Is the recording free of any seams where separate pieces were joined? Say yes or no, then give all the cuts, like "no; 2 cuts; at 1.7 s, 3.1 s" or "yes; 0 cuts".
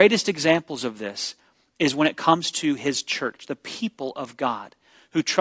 yes; 0 cuts